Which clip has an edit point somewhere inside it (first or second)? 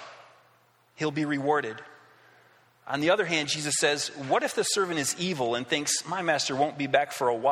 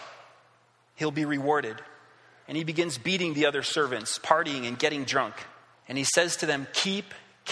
second